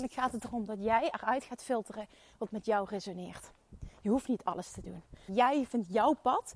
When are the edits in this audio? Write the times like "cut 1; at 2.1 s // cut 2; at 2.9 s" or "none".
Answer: cut 1; at 5.3 s